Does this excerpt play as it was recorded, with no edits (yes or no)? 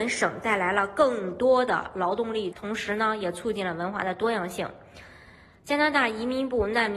no